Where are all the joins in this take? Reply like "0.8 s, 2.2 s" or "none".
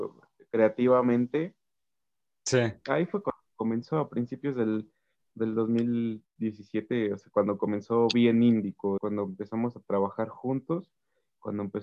9.0 s